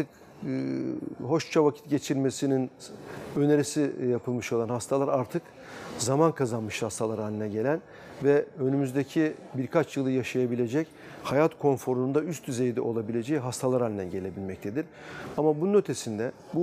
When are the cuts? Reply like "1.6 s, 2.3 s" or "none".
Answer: 15.3 s